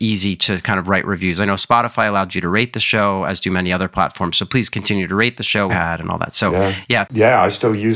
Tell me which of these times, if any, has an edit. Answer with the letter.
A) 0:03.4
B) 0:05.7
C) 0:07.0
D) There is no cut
B